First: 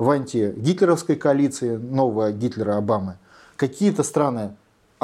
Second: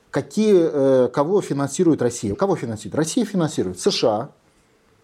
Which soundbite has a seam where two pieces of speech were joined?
second; 1 cut; at 2.3 s

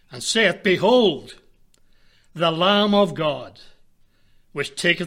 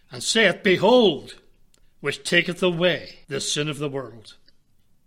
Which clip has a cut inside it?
second; 2 cuts; at 1.8 s, 3.2 s

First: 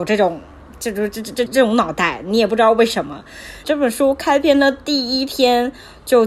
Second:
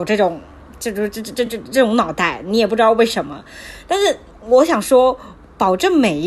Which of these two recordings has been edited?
first; 2 cuts; at 1.5 s, 3.6 s

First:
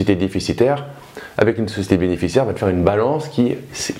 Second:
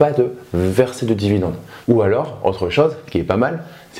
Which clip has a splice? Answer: second; 1 cut; at 1.8 s

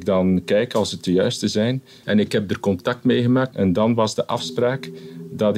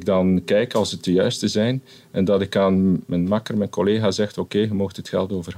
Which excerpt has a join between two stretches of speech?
first; 2 cuts; at 2.0 s, 3.5 s

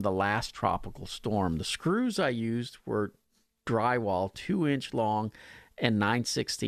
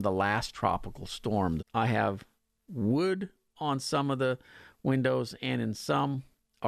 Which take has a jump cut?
second; 1 cut; at 1.6 s

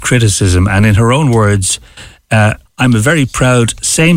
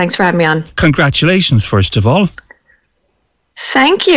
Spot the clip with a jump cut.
first; 1 cut; at 2.7 s

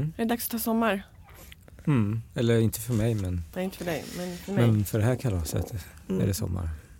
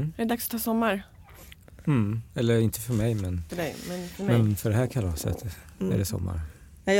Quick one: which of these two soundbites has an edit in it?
second; 1 cut; at 3.5 s

